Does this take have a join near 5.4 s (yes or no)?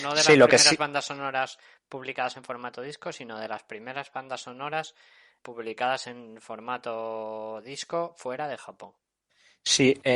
yes